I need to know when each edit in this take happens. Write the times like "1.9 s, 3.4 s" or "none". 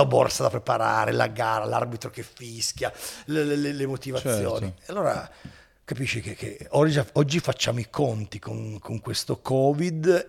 none

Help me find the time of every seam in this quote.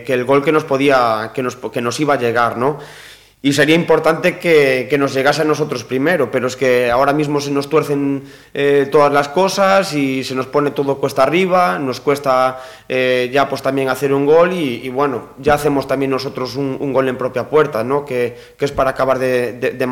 none

